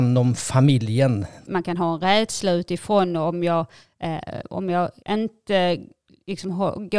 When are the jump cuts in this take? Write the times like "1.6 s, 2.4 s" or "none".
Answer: 1.4 s, 5.0 s

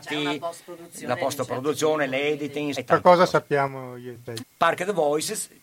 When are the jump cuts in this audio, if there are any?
2.7 s, 4.4 s

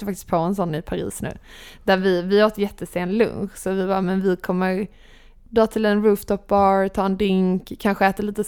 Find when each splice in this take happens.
none

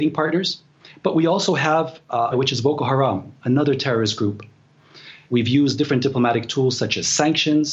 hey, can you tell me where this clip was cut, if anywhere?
2.3 s, 5.3 s

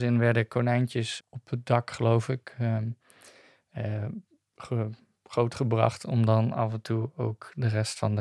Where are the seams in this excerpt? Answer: 1.2 s

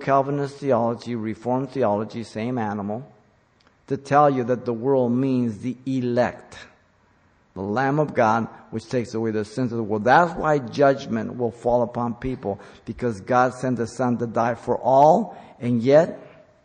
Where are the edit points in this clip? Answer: 7.4 s

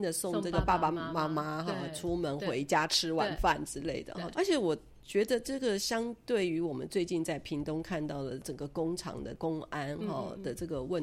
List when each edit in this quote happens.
4.3 s

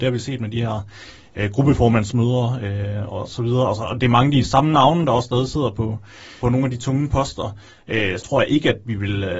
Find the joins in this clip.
6.4 s, 8.2 s

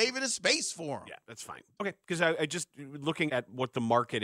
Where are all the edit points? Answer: 1.8 s, 3.3 s

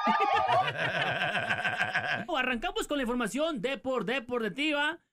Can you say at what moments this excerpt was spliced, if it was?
2.3 s

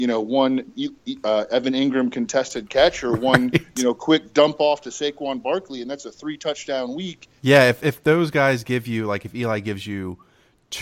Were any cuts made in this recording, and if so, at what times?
7.4 s

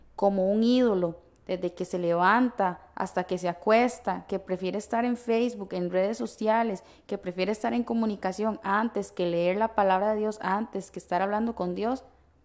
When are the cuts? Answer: none

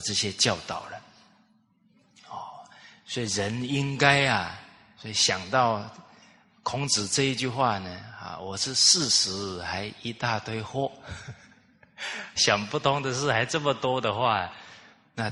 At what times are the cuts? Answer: 5.0 s, 12.4 s

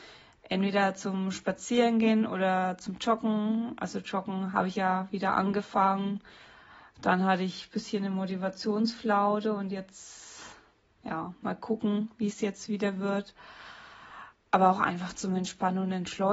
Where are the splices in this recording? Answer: none

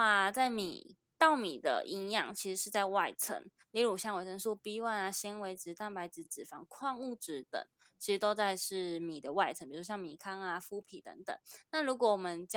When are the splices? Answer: none

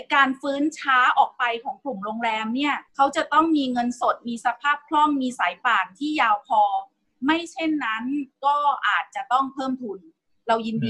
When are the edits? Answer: 2.9 s

